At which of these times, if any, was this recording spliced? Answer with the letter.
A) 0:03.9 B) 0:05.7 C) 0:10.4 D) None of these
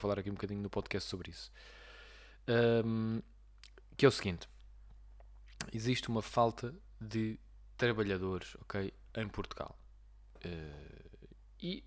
D